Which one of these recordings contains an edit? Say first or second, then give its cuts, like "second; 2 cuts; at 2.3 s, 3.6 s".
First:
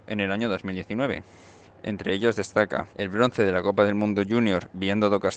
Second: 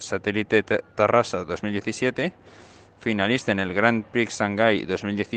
first; 2 cuts; at 1.6 s, 2.9 s